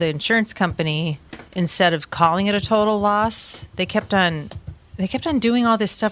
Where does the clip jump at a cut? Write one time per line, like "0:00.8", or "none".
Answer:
0:01.5